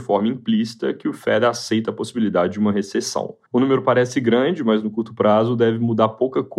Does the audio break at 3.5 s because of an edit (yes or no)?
yes